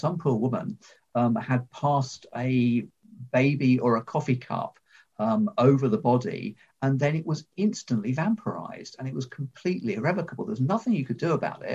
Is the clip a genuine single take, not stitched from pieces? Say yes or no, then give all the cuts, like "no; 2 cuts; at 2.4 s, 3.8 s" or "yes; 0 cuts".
yes; 0 cuts